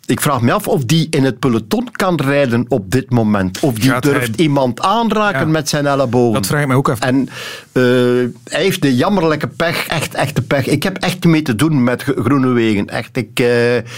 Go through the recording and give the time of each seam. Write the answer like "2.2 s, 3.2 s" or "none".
7.0 s, 9.9 s